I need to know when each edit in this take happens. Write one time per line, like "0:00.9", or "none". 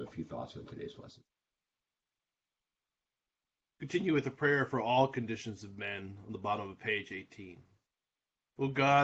none